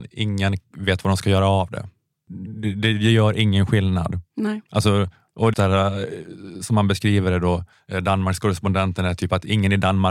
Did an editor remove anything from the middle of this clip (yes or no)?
yes